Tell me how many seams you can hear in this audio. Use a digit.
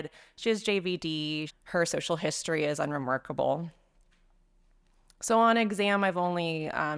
1